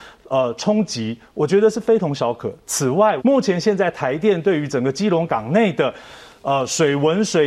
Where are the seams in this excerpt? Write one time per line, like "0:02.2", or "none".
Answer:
0:03.2
0:05.3